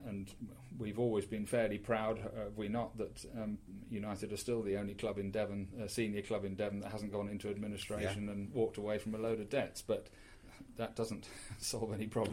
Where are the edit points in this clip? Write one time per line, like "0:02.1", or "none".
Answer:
none